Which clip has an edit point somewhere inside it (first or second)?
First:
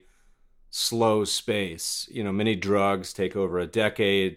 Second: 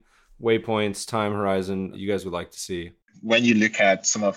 second